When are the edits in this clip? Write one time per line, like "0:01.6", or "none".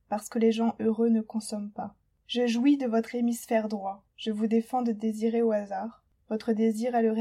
0:04.1